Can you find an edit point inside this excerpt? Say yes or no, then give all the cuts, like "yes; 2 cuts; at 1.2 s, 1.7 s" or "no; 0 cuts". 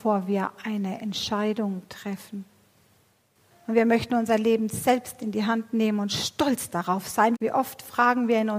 yes; 2 cuts; at 3.5 s, 7.3 s